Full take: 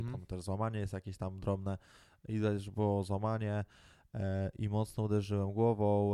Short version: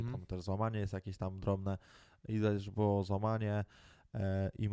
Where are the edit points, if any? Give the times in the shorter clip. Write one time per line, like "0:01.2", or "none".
none